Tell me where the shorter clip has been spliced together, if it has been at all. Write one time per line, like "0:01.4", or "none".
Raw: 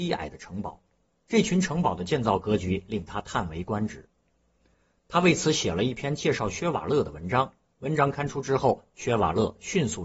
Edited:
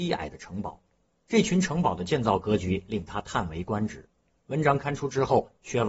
0:04.4